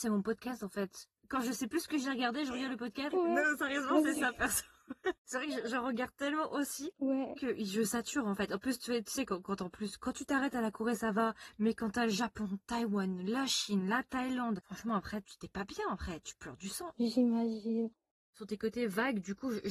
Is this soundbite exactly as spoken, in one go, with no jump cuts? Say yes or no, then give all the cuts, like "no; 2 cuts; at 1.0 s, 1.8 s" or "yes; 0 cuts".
no; 2 cuts; at 3.1 s, 15.2 s